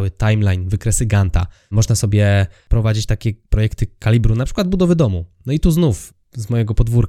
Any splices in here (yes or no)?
yes